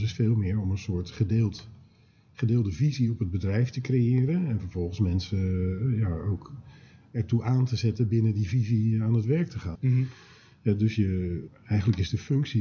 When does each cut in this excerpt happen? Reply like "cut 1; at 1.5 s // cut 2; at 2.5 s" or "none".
cut 1; at 9.8 s // cut 2; at 11.5 s